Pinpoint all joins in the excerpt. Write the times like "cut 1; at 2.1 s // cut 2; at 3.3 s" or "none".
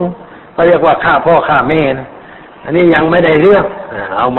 none